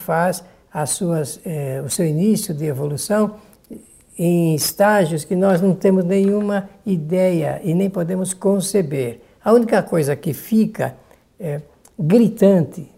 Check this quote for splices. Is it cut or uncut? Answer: uncut